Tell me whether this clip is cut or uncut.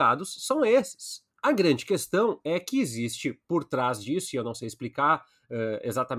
cut